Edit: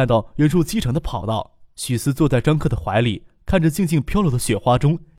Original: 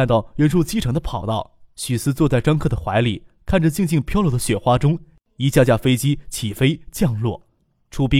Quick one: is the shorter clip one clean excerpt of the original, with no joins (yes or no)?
yes